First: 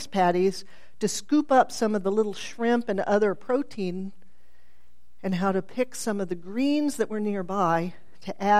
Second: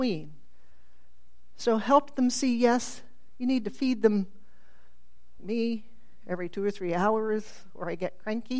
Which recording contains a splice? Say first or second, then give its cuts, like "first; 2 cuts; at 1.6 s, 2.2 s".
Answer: second; 1 cut; at 5.4 s